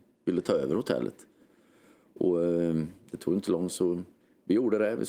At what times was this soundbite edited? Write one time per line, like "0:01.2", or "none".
0:03.7